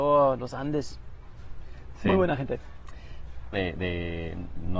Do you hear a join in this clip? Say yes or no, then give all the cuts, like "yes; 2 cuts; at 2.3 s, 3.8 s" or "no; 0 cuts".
yes; 1 cut; at 3.5 s